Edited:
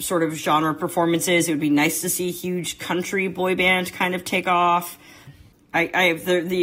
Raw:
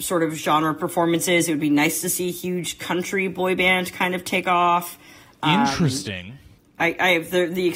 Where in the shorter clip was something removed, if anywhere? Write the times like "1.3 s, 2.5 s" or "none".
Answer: 5.3 s